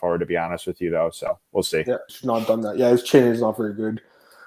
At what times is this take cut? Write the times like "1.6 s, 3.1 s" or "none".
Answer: 2.1 s